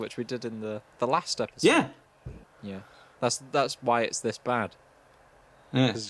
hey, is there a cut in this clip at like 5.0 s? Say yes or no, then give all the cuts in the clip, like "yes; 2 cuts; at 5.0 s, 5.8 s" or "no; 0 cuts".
no; 1 cut; at 2.4 s